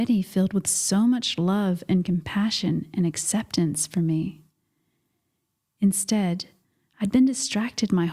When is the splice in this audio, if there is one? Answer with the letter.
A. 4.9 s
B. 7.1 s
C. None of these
C